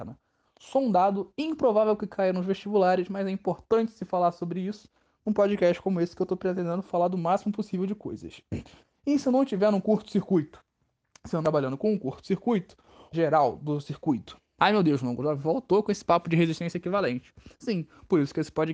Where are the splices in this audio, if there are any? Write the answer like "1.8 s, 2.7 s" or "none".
13.1 s, 14.6 s